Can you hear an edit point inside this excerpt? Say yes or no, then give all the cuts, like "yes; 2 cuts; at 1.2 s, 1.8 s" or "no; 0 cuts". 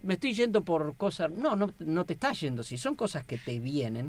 no; 0 cuts